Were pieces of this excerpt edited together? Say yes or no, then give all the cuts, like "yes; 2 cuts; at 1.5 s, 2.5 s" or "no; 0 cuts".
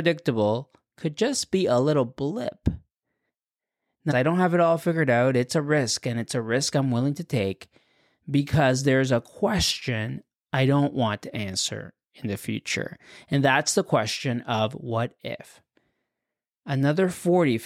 yes; 1 cut; at 4.1 s